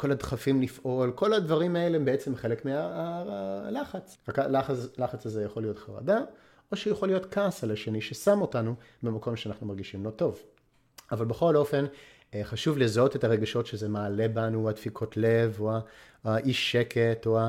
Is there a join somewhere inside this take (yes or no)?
yes